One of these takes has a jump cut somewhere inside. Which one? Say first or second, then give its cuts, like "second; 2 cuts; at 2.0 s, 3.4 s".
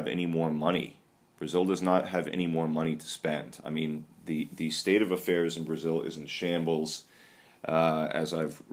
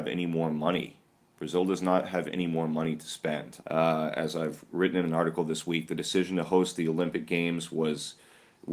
second; 1 cut; at 3.6 s